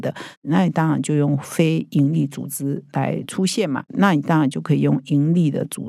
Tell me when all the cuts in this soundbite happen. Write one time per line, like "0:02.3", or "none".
0:03.9